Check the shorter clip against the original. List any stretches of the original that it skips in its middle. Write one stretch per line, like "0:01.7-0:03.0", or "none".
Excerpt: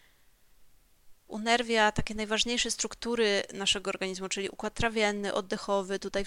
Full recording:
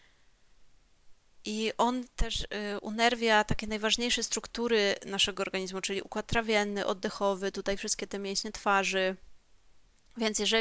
0:01.3-0:02.8